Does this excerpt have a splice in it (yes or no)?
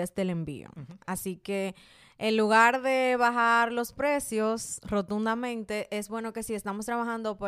no